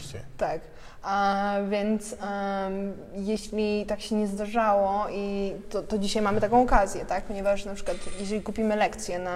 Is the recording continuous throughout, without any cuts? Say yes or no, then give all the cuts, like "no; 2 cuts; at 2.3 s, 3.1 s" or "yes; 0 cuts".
no; 1 cut; at 5.6 s